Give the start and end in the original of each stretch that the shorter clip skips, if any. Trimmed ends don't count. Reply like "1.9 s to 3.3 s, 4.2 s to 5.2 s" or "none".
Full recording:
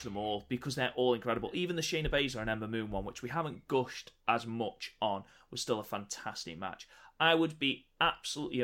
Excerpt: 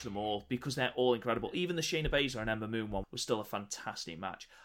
3.0 s to 5.4 s